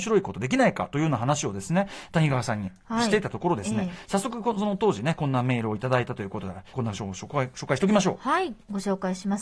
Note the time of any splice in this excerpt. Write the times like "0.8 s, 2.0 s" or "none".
6.7 s

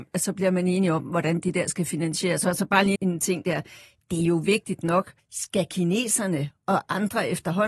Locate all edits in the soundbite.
2.9 s, 5.2 s

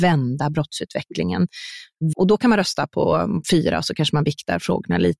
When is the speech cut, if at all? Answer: 2.1 s, 3.4 s

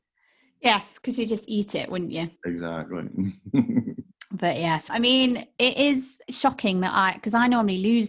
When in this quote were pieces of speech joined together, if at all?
2.4 s, 4.9 s

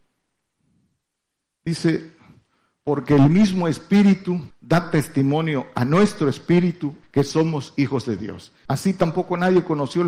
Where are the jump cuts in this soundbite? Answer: 4.5 s, 7.0 s, 8.7 s

